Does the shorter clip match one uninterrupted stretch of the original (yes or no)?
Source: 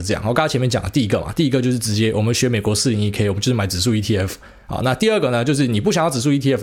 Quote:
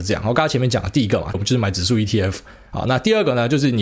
no